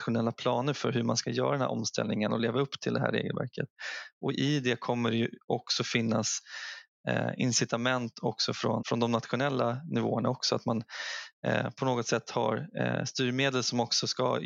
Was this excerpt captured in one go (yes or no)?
no